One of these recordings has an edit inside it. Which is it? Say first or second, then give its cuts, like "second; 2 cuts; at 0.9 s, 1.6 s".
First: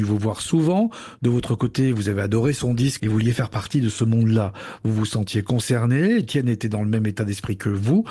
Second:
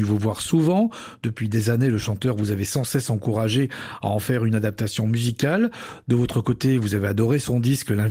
first; 2 cuts; at 1.2 s, 3.0 s